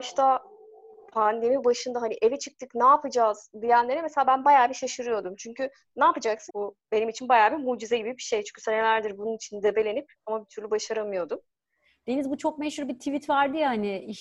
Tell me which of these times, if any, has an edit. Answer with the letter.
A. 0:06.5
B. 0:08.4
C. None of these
A